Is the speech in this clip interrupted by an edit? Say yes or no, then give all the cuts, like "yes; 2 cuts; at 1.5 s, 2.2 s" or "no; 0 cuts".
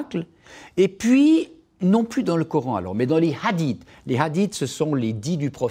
no; 0 cuts